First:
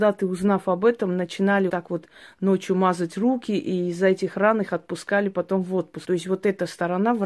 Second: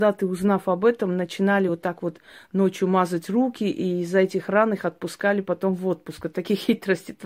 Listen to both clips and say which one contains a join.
first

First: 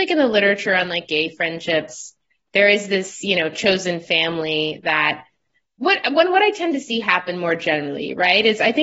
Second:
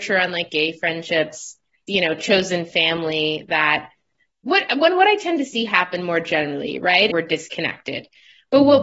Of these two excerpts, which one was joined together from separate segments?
second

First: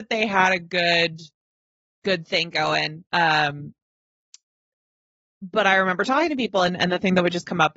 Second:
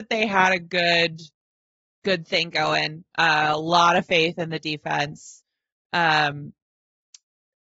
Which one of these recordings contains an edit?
first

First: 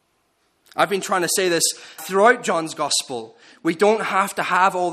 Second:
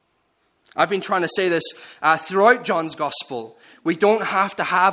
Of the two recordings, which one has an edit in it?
first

